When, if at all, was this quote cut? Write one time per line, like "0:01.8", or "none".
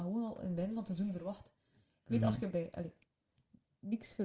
0:02.5